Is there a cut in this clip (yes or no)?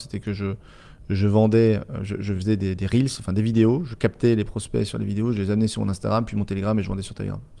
no